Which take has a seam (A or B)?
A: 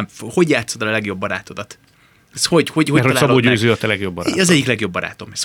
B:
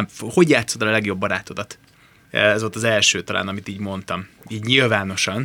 B